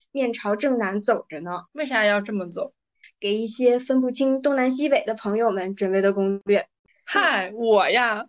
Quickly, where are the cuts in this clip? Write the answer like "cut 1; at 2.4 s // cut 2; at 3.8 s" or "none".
cut 1; at 1.7 s // cut 2; at 3.0 s

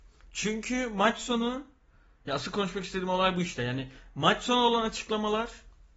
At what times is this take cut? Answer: none

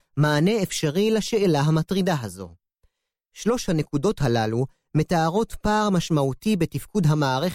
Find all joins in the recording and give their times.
cut 1; at 3.1 s

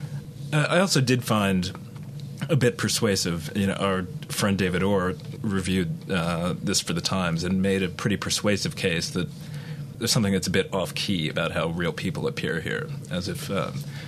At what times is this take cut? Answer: cut 1; at 5.4 s

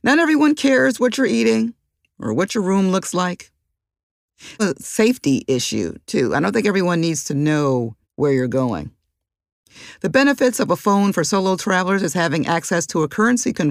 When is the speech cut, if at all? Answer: cut 1; at 4.6 s // cut 2; at 8.0 s

